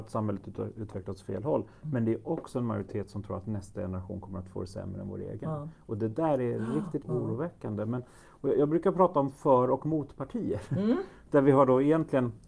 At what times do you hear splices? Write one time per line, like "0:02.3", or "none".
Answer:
0:07.0